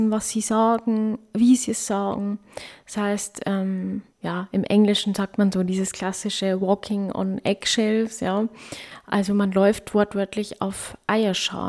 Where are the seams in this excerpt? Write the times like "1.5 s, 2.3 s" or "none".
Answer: 4.1 s